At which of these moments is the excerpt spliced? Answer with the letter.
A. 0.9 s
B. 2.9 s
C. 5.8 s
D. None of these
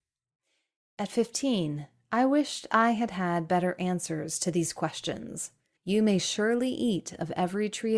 C